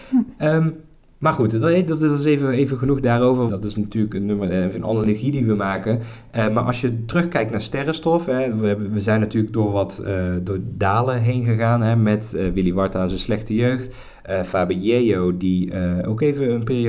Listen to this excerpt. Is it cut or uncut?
cut